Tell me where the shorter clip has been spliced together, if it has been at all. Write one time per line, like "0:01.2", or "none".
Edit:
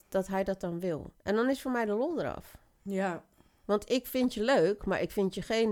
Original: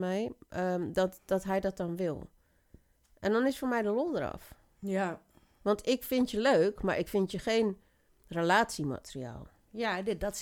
0:01.2